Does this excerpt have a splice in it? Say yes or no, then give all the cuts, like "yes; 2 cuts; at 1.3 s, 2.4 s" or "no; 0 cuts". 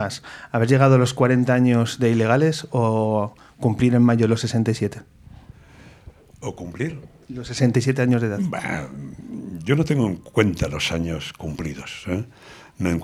no; 0 cuts